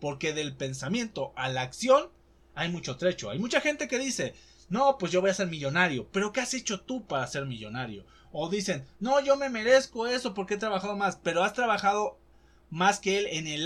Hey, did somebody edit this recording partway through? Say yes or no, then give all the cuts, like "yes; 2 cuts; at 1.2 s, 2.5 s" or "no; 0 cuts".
no; 0 cuts